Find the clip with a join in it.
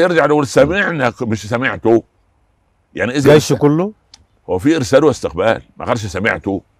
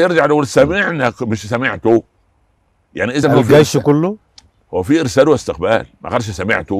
first; 1 cut; at 3.2 s

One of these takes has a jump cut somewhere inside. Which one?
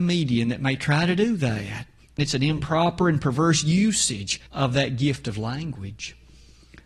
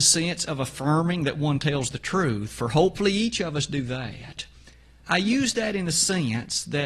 first; 2 cuts; at 2.2 s, 4.5 s

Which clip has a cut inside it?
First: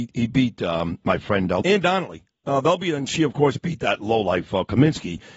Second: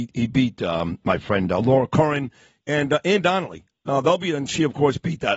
first; 1 cut; at 1.6 s

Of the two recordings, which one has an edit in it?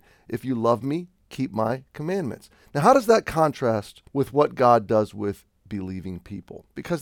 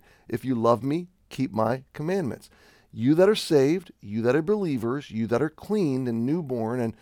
first; 2 cuts; at 2.6 s, 4.1 s

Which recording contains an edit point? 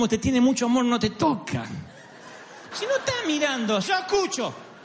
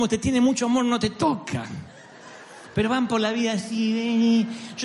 first; 2 cuts; at 2.7 s, 3.8 s

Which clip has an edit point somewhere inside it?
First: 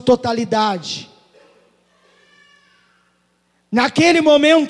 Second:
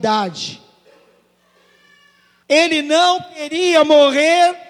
second; 1 cut; at 2.4 s

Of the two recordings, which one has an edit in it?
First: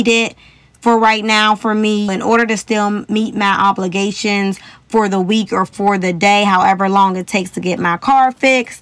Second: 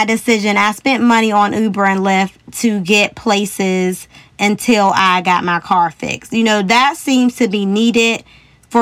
first; 1 cut; at 2.1 s

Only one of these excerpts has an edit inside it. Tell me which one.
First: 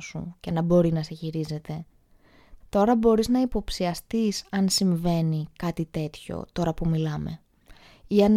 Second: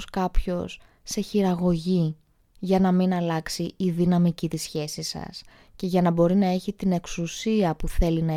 first; 1 cut; at 2.6 s

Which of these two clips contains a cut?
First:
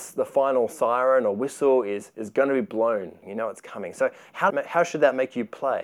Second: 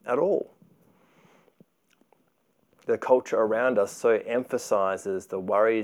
first; 2 cuts; at 3.2 s, 4.5 s

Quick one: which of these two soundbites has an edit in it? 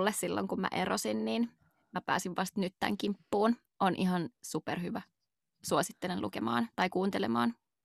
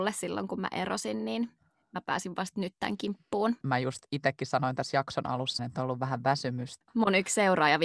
second; 3 cuts; at 3.6 s, 5.6 s, 6.8 s

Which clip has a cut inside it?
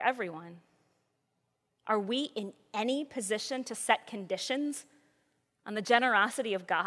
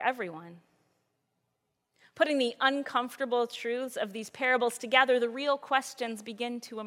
first; 1 cut; at 1.7 s

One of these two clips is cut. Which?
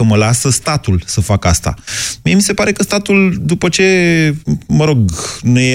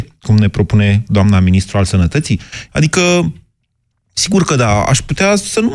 second; 1 cut; at 2.7 s

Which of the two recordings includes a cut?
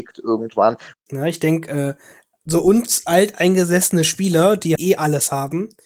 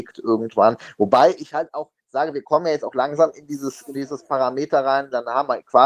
first; 2 cuts; at 0.9 s, 4.8 s

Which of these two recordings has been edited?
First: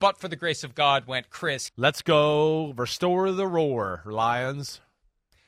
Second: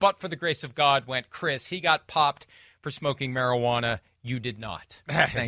first; 1 cut; at 1.7 s

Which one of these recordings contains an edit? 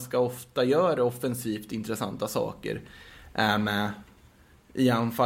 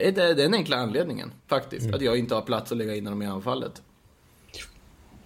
second; 1 cut; at 1.4 s

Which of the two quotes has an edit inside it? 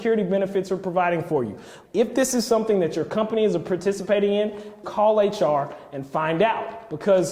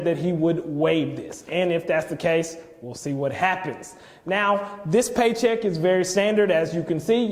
first; 2 cuts; at 1.9 s, 4.8 s

